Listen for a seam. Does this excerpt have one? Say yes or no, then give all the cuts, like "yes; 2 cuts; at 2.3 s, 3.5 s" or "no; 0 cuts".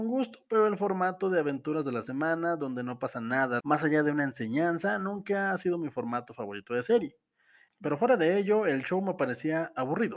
yes; 2 cuts; at 3.6 s, 7.7 s